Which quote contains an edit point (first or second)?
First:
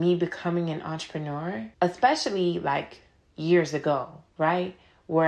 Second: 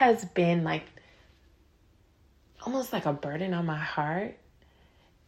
first